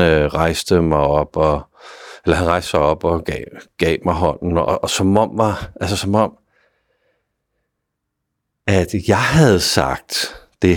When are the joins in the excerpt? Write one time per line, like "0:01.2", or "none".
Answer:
none